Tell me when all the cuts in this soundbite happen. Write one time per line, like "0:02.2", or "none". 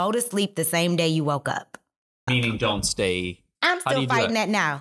0:02.3
0:03.5